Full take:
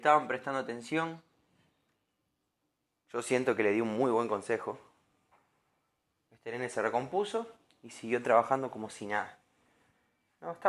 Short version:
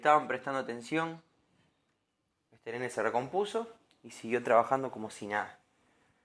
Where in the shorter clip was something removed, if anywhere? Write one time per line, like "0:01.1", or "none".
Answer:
0:02.3